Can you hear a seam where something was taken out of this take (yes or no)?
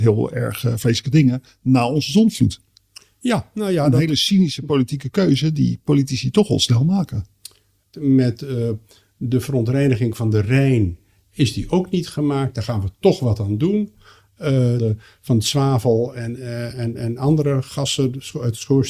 yes